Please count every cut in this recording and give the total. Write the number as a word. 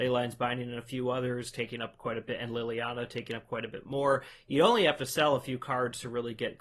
zero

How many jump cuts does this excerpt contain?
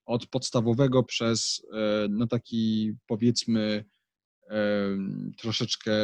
two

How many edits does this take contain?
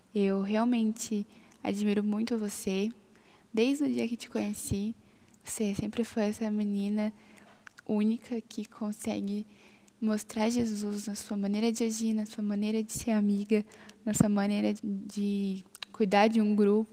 one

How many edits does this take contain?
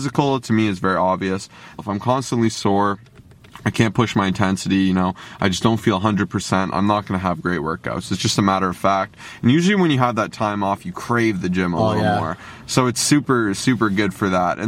one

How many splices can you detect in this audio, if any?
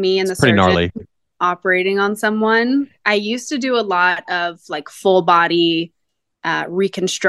zero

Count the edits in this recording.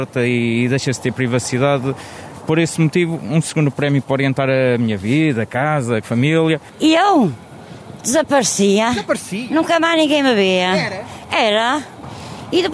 one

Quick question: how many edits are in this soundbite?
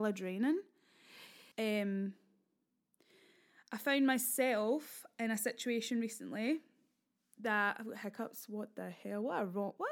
one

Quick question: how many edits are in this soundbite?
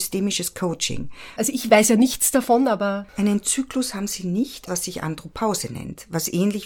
two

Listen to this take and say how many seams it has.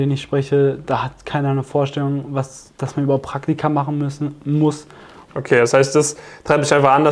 one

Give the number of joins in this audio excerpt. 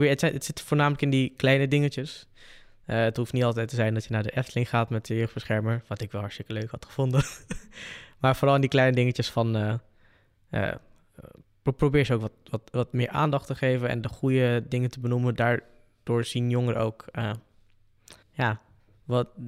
one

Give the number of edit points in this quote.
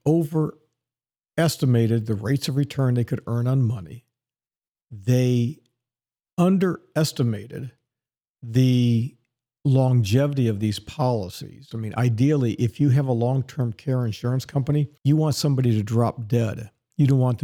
two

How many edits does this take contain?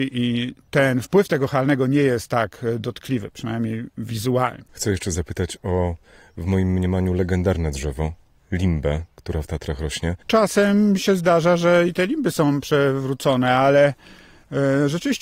two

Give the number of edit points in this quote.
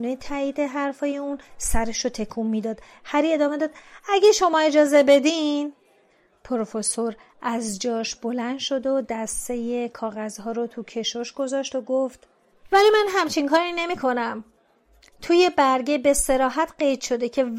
zero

